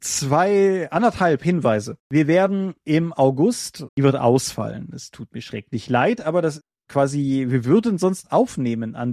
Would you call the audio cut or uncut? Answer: cut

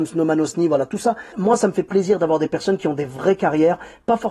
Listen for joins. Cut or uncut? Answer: cut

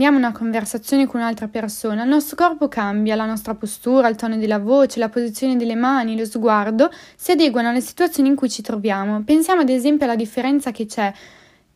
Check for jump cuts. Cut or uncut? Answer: uncut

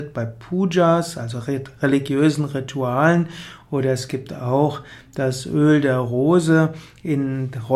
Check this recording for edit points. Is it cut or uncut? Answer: uncut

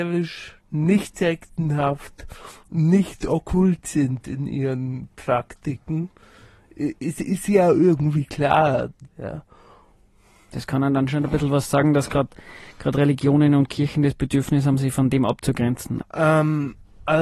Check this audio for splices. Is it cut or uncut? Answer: cut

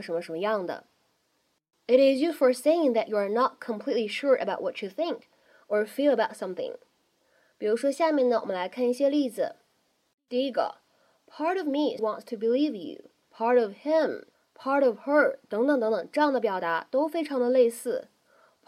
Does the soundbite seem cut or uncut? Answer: cut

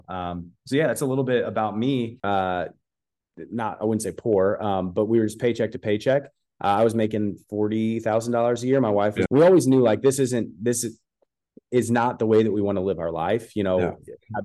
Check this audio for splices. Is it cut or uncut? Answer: cut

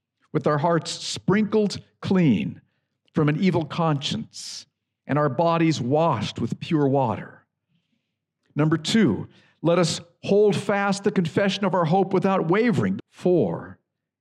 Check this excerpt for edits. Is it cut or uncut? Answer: cut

